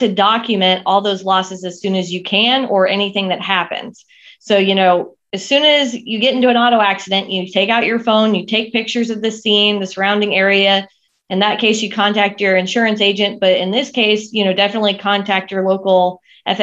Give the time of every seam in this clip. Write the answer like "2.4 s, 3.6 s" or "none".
none